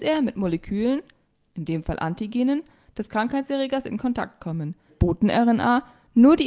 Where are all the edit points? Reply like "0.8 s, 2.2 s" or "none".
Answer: 4.9 s